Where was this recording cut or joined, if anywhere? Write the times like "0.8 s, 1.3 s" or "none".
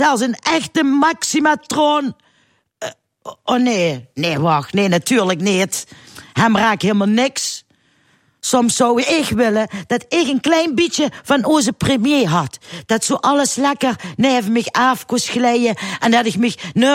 none